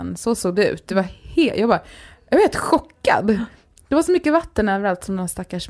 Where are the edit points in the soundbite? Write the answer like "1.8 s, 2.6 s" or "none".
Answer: none